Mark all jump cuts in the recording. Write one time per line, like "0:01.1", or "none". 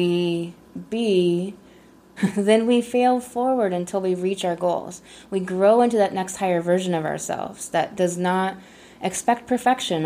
0:02.2

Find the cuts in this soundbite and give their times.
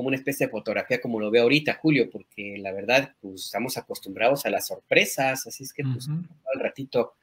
0:03.1

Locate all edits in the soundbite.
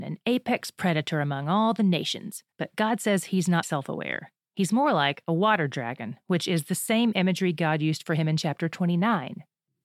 0:02.5
0:03.6

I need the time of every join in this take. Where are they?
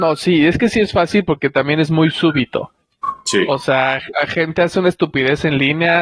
none

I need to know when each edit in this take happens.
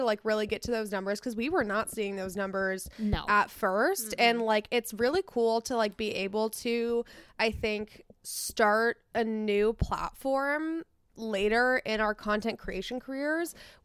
none

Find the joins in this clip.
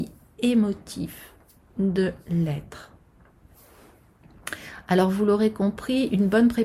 none

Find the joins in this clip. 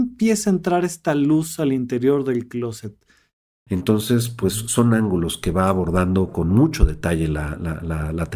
0:03.7

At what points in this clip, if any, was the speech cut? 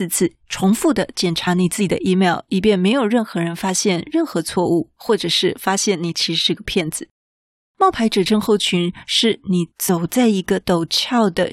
none

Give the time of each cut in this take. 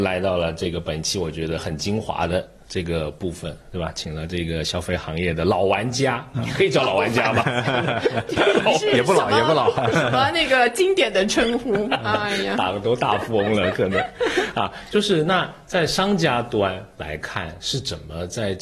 none

